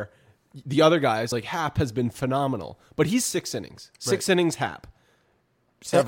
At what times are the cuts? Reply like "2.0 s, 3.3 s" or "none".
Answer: none